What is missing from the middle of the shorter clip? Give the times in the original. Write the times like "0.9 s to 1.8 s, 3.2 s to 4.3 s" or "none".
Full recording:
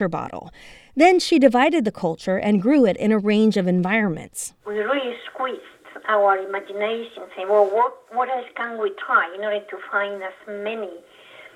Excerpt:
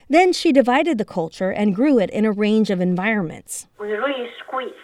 none

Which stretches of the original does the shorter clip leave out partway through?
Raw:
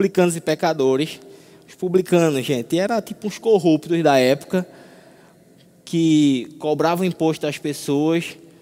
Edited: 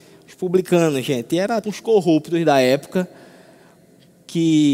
3.0 s to 3.2 s

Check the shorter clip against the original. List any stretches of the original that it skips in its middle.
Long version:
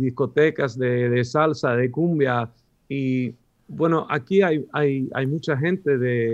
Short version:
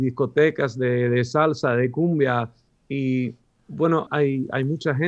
4.1 s to 4.7 s

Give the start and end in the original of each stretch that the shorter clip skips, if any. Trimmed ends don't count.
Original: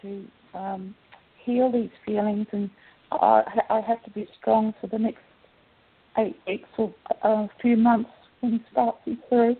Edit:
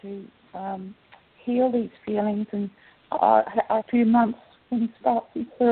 3.8 s to 7.5 s

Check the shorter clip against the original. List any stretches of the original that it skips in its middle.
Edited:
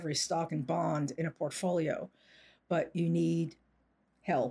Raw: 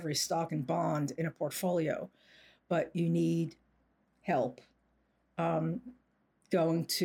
none

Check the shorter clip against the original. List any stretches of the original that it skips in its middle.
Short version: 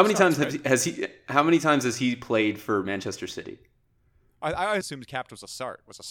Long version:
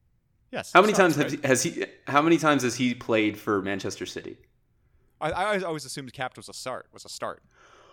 5.6 s to 5.9 s

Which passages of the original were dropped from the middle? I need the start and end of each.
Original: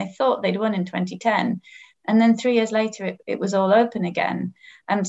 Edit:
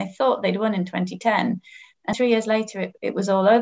2.1 s to 2.4 s

